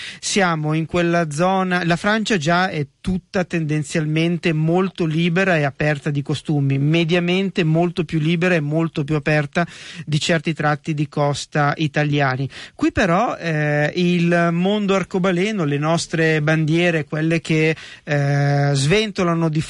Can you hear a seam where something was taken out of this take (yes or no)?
no